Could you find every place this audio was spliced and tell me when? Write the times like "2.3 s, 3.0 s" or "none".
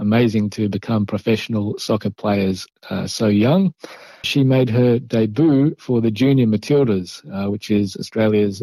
4.2 s